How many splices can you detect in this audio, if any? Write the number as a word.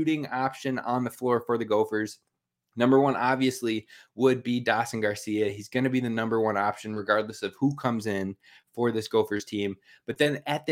zero